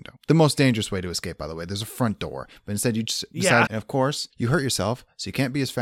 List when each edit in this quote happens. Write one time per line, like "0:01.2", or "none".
0:03.7

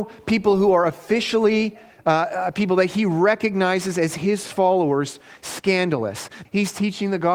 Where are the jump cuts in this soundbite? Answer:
0:06.4

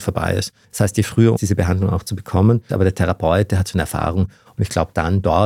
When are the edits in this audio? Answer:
0:01.4
0:02.7

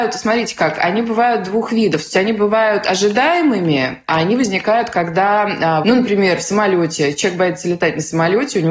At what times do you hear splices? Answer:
0:05.8

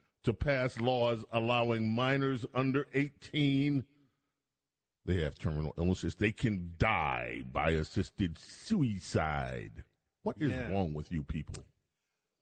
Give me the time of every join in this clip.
none

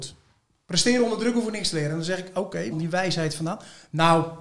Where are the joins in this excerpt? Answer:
0:02.7

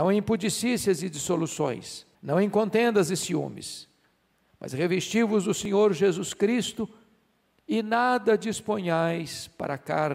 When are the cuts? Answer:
0:02.1

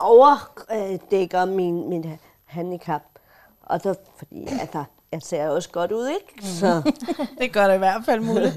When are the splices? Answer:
none

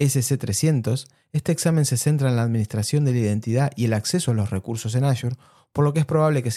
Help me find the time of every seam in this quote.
none

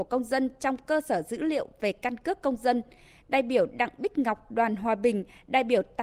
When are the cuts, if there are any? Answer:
none

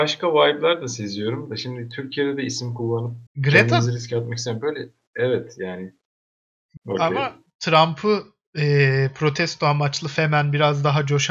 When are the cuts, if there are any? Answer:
0:03.3
0:06.8

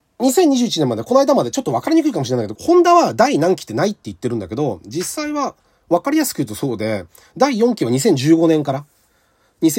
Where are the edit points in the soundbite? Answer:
0:02.6

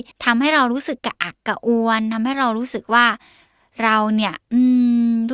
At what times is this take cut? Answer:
0:01.0

